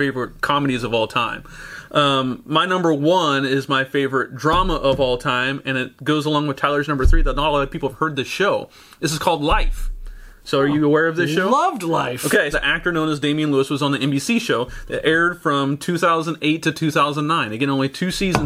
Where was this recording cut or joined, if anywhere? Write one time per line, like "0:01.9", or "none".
0:12.5